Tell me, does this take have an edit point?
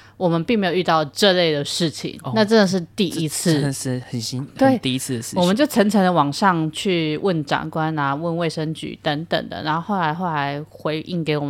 yes; 1 cut; at 4.0 s

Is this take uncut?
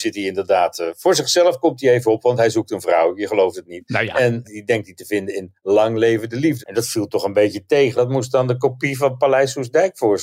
no; 3 cuts; at 4.4 s, 6.6 s, 8.0 s

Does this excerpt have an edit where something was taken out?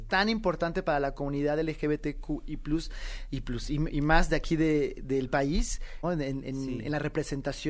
yes; 1 cut; at 6.0 s

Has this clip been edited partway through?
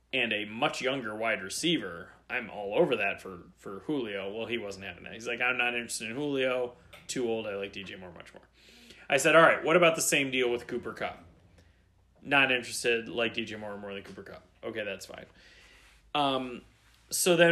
no; 0 cuts

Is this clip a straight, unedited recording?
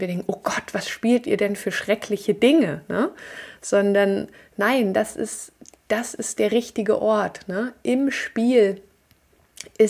yes; 0 cuts

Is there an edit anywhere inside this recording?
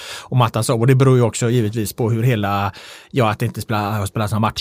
no; 0 cuts

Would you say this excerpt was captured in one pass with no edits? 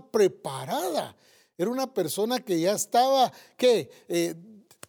yes; 0 cuts

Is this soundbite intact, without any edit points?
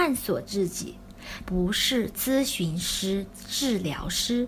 no; 1 cut; at 1.5 s

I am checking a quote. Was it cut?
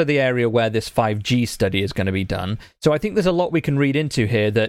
no; 0 cuts

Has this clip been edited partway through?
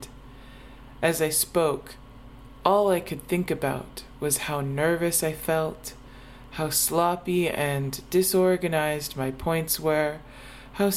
no; 0 cuts

